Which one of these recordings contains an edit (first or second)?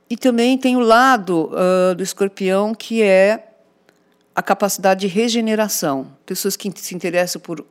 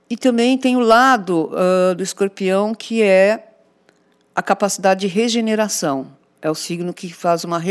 first